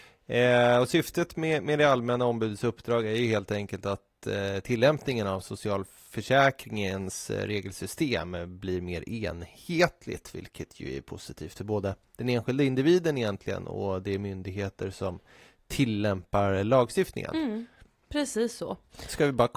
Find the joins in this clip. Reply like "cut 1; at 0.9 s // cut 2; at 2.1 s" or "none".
none